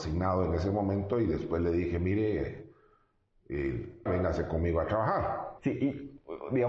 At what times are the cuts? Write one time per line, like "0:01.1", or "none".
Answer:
0:04.1
0:05.6